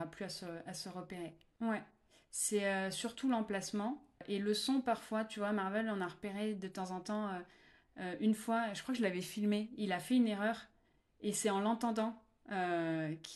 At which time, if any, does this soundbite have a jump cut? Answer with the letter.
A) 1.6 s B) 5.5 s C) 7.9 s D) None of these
A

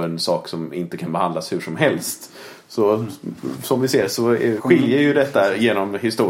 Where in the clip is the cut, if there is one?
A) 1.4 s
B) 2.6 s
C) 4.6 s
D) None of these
C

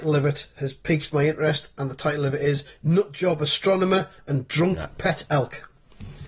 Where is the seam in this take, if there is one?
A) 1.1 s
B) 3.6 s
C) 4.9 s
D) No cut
D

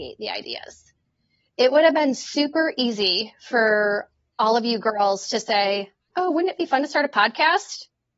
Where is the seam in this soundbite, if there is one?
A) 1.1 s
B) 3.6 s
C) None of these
C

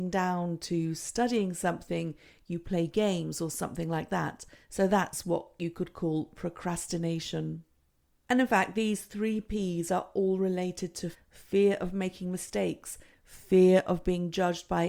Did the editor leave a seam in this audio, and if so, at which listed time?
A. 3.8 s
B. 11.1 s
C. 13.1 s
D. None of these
B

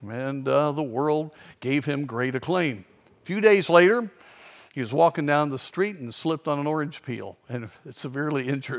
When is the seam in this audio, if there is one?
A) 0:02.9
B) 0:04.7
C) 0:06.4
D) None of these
D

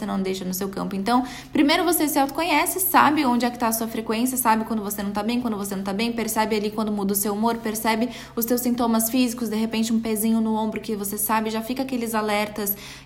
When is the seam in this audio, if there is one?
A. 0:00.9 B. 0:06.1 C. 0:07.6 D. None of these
D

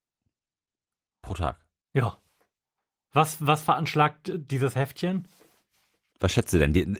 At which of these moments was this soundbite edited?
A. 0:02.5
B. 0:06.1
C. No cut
B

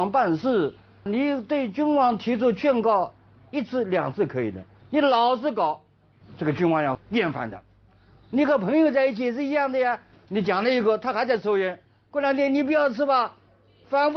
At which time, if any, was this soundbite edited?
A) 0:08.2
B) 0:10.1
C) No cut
B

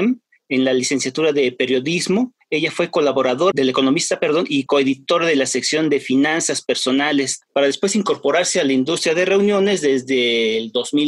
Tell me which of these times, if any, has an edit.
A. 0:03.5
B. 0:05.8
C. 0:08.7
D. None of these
A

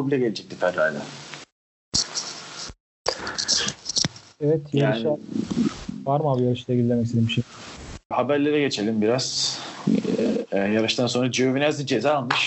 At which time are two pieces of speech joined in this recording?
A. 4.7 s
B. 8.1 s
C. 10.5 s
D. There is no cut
B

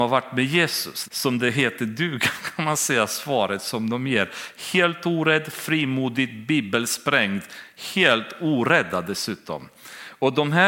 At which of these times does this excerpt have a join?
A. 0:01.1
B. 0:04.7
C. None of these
A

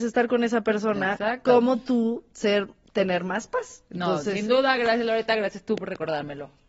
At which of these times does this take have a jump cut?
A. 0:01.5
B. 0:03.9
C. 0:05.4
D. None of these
D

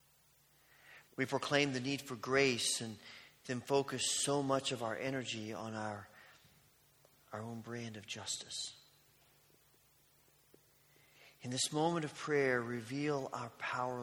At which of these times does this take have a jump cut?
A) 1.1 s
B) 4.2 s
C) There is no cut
A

